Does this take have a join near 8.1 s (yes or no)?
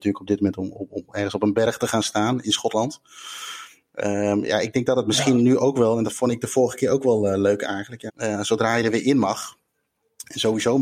yes